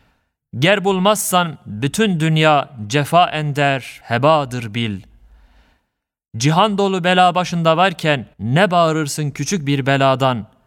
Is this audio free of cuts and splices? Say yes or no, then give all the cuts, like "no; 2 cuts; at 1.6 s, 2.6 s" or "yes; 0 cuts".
no; 2 cuts; at 4.0 s, 8.3 s